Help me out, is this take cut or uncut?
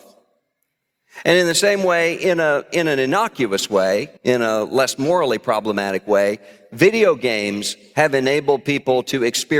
cut